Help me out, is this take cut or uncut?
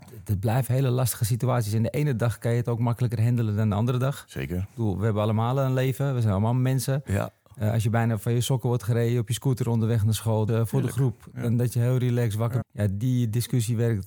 cut